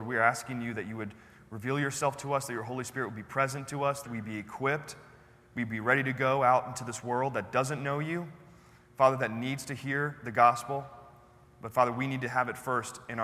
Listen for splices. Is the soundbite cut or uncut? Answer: cut